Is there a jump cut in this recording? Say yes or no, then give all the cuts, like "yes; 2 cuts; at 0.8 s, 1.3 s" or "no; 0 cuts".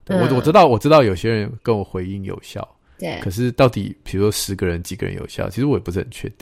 no; 0 cuts